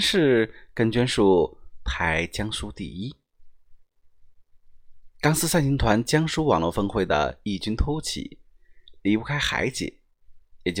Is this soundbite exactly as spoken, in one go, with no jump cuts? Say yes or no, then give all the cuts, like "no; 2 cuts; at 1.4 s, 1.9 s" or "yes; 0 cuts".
yes; 0 cuts